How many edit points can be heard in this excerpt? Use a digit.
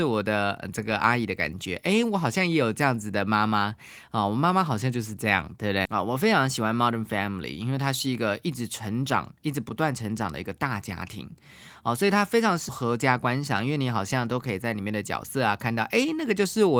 2